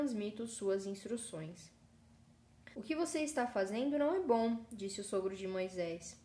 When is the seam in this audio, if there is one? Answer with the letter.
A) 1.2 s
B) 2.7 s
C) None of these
B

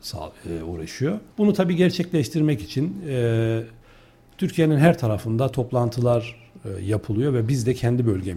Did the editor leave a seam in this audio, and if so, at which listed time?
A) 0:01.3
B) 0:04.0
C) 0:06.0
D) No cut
A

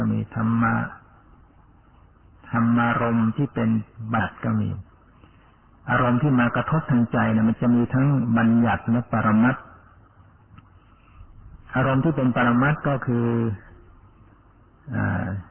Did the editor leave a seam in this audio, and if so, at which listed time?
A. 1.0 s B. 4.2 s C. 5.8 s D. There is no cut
B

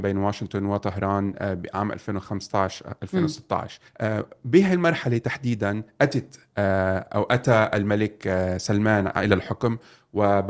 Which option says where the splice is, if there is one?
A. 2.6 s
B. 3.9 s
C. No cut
B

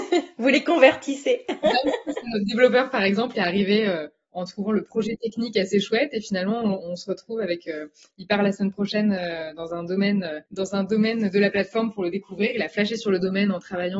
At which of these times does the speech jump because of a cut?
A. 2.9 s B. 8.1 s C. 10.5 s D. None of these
C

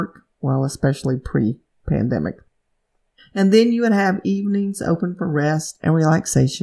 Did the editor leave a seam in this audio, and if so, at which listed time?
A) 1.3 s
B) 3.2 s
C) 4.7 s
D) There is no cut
D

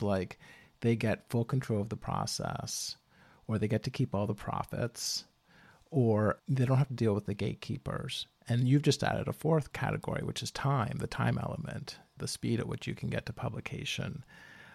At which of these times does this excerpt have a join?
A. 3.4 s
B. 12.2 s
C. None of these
B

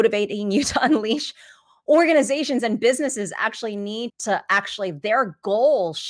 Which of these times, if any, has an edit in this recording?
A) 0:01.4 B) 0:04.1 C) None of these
B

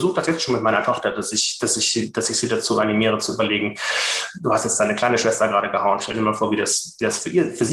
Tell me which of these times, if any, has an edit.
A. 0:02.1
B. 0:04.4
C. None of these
C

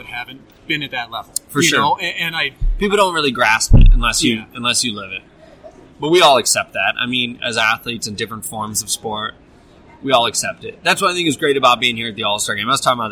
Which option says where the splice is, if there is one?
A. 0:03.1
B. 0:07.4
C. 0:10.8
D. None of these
D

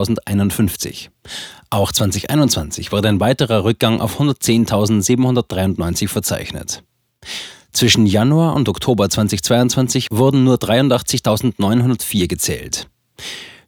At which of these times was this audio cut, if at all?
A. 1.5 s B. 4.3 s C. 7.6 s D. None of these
D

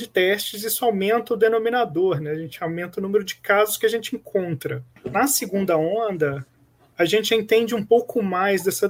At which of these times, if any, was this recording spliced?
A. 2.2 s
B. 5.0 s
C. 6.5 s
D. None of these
B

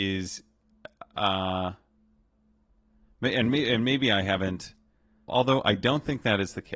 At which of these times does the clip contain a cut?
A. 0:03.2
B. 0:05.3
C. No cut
B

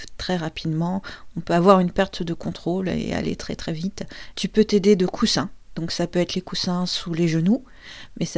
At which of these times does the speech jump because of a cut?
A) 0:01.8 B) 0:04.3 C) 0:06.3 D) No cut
B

